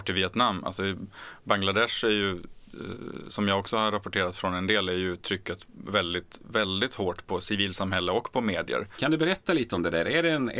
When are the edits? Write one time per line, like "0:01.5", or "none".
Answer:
0:09.0